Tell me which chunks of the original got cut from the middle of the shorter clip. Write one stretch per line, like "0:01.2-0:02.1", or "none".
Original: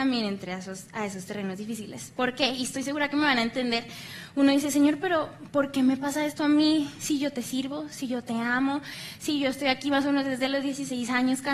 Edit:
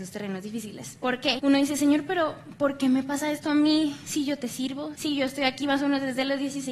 0:02.5-0:04.3
0:07.9-0:09.2

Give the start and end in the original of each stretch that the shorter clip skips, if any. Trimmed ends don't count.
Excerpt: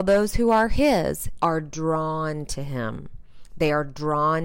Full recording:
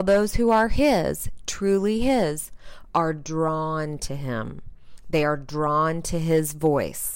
0:01.4-0:02.9

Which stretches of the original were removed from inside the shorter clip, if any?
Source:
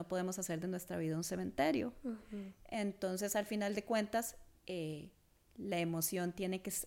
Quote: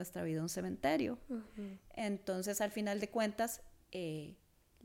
none

